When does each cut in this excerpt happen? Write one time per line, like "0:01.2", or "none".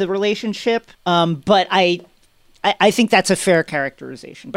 0:00.9